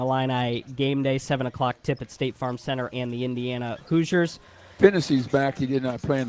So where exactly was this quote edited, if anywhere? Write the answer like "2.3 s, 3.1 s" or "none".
2.9 s, 4.8 s